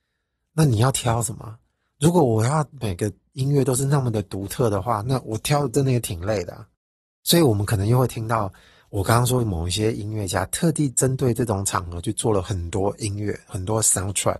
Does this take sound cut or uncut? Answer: uncut